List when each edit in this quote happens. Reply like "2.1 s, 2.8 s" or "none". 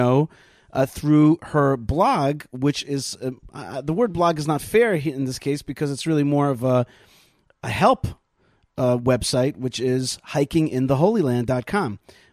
none

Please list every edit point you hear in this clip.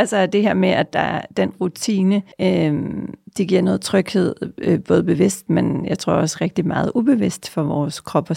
2.3 s

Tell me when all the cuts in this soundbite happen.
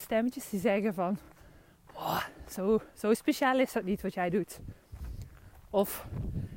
none

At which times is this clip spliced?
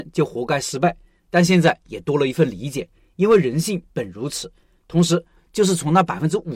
5.4 s

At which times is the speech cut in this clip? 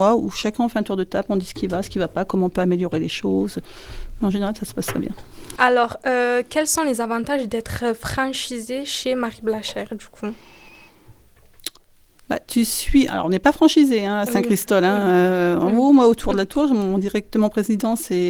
5.6 s

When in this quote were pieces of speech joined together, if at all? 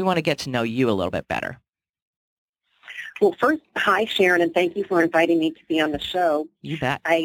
none

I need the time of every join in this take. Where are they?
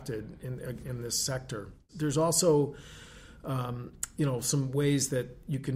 none

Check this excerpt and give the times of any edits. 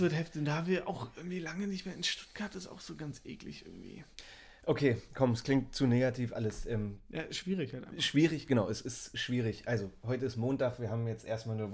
none

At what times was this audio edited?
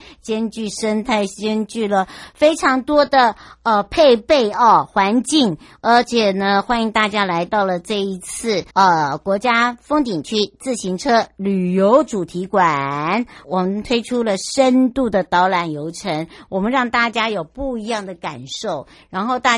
8.7 s, 13.4 s

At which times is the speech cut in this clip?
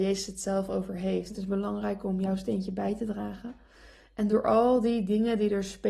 1.3 s

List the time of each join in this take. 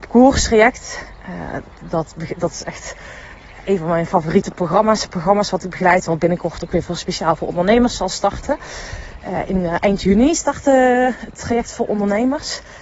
1.7 s

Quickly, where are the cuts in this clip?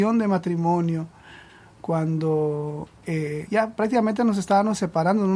3.5 s

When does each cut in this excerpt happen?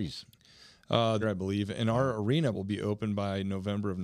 1.2 s, 2.5 s

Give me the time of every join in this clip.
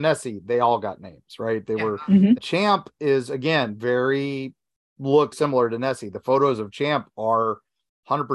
2.4 s, 5.3 s

